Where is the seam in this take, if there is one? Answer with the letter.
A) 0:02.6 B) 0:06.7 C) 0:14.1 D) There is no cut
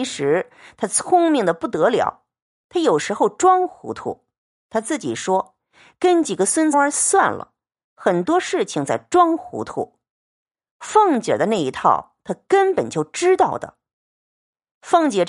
B